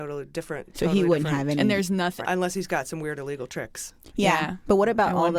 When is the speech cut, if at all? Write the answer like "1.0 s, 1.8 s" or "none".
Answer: 2.2 s